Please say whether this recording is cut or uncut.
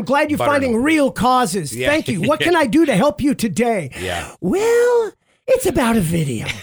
uncut